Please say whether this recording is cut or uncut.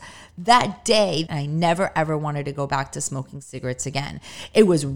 cut